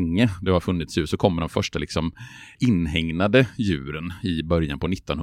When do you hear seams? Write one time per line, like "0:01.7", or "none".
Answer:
0:02.5